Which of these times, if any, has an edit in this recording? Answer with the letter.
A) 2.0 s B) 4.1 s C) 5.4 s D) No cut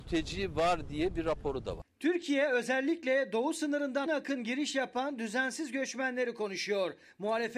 B